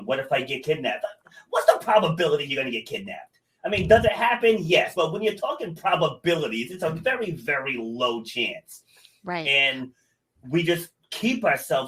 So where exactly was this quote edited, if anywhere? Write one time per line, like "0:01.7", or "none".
none